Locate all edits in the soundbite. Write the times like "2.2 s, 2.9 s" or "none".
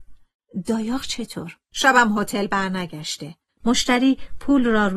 1.7 s, 3.6 s